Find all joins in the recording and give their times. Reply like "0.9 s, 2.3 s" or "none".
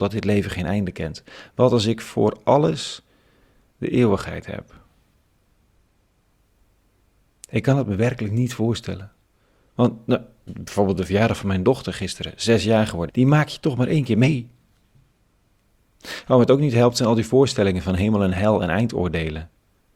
13.1 s, 15.9 s